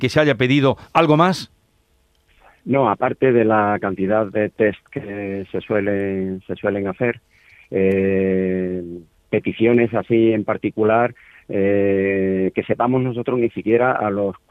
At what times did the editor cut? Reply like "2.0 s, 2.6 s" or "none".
none